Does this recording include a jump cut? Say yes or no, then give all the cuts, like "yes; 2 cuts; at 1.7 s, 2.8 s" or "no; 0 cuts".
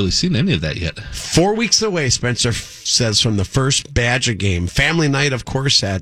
no; 0 cuts